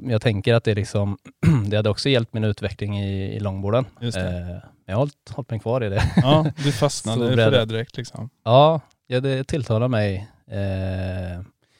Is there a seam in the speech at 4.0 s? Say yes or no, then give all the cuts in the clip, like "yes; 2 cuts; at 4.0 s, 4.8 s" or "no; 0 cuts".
yes; 1 cut; at 4.0 s